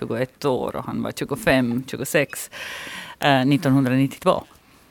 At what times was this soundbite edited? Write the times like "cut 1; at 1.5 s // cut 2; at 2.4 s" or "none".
none